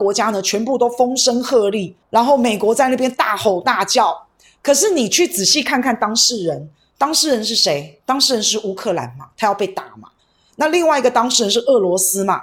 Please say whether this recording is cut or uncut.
cut